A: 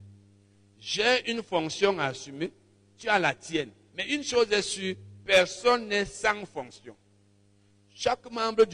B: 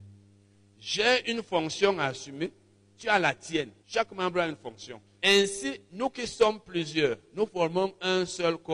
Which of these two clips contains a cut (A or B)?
B